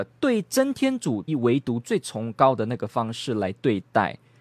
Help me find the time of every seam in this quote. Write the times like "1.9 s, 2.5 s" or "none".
1.3 s